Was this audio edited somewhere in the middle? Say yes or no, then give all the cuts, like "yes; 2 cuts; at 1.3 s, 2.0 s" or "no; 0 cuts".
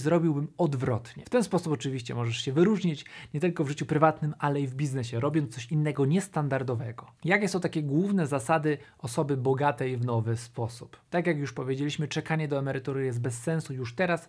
no; 0 cuts